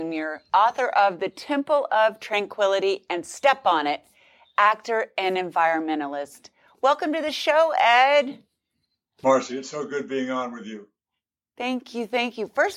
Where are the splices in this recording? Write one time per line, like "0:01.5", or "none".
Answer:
none